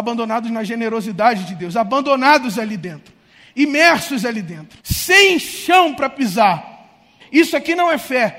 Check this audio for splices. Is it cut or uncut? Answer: cut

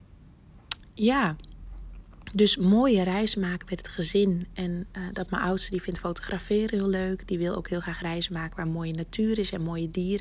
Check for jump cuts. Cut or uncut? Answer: uncut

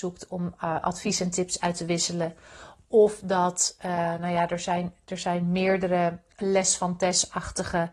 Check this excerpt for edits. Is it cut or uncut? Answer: uncut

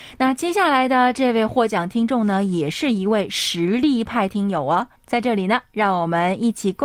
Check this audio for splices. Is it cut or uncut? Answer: cut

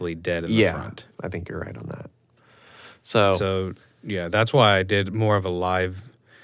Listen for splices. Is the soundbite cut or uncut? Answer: cut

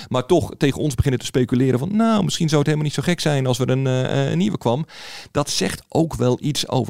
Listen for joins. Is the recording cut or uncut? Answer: uncut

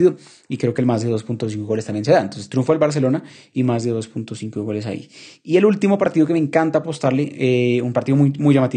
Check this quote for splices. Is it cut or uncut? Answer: uncut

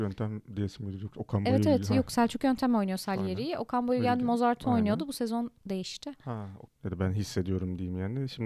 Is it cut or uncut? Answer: cut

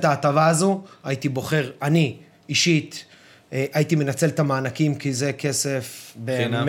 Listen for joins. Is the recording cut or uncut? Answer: uncut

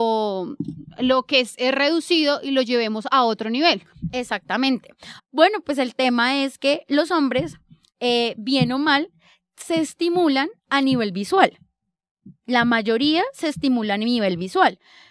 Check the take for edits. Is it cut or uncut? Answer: cut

